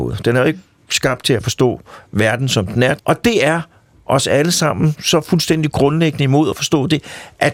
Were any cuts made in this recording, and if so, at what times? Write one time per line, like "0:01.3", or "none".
0:03.0